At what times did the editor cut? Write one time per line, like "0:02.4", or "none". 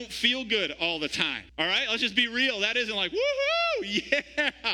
0:01.5